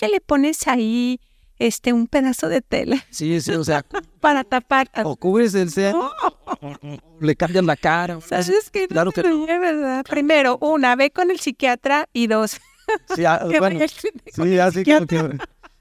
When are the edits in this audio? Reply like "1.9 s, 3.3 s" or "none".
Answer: none